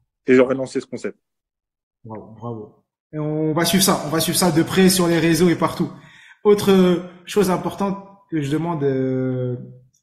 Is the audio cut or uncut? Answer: uncut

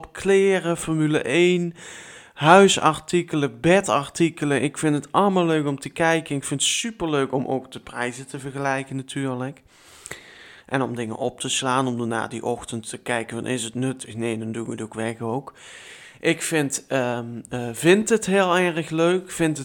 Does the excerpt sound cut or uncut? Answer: uncut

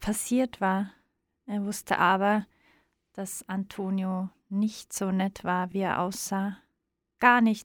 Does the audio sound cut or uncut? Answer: uncut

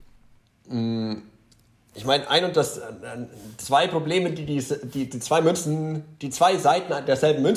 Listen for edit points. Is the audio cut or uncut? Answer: uncut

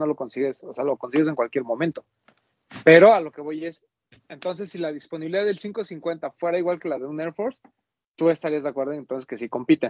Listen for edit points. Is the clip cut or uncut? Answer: uncut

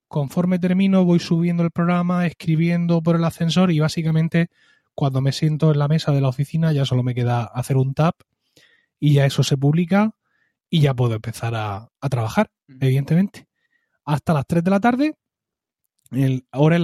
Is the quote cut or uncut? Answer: uncut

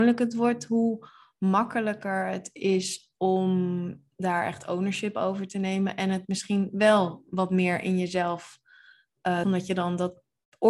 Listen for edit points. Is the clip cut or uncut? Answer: cut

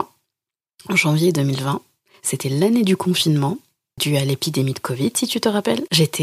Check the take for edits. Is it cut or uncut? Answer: cut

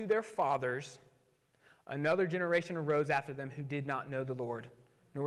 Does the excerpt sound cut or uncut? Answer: uncut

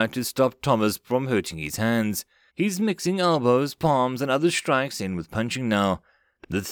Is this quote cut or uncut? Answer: cut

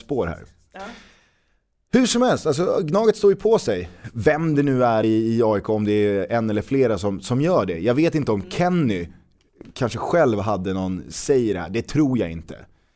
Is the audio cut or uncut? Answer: uncut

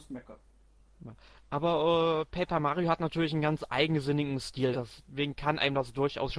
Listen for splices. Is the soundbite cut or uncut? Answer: cut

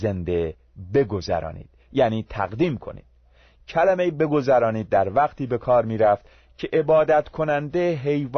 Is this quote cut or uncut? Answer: uncut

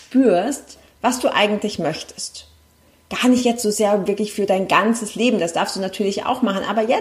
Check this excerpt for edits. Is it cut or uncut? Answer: uncut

